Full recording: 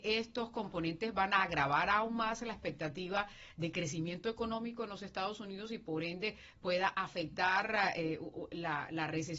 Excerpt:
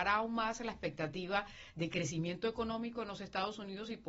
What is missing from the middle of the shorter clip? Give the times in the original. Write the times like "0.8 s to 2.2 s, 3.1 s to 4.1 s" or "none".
none